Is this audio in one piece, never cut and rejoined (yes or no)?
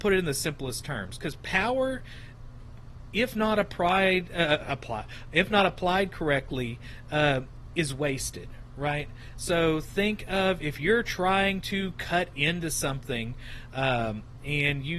yes